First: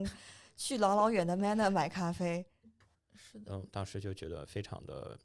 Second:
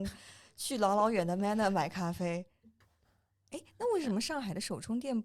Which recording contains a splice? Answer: first; 1 cut; at 2.9 s

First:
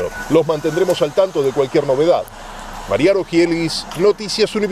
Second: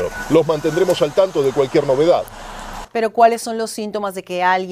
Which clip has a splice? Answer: second; 1 cut; at 2.8 s

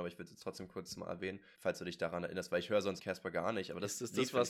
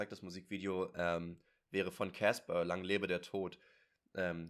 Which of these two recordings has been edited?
first; 2 cuts; at 1.5 s, 3.0 s

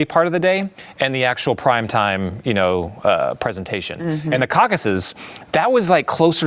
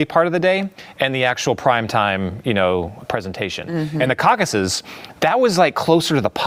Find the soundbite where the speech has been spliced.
second; 1 cut; at 3.0 s

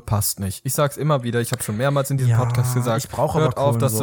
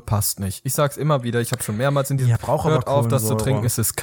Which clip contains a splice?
second; 1 cut; at 2.4 s

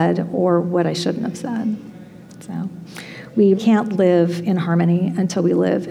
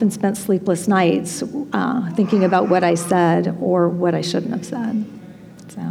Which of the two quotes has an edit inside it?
first; 1 cut; at 3.6 s

